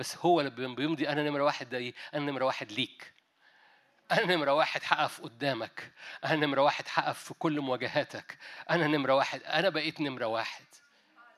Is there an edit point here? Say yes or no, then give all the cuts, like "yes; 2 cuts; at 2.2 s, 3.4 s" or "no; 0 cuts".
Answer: no; 0 cuts